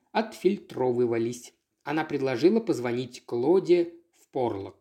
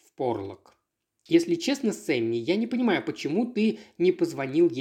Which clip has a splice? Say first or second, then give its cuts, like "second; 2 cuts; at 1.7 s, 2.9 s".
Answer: first; 1 cut; at 1.7 s